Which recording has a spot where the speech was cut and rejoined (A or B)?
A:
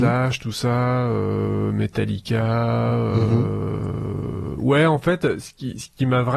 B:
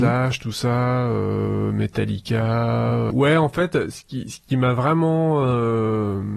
B